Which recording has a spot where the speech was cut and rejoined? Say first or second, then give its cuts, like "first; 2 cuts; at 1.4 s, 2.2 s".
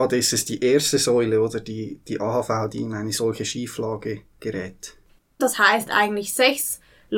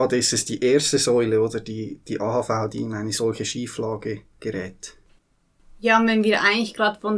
first; 1 cut; at 5.4 s